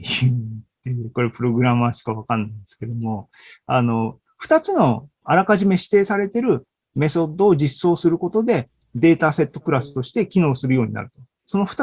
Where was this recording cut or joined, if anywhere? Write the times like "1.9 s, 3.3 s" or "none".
5.2 s